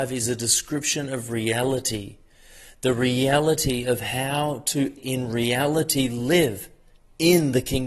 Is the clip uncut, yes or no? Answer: no